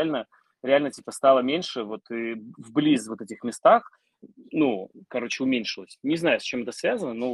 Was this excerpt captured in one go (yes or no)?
yes